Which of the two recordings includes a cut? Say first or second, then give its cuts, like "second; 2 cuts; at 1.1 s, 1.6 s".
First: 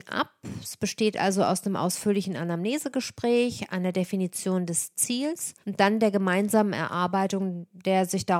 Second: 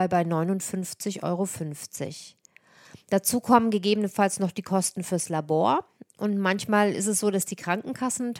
first; 2 cuts; at 3.7 s, 5.6 s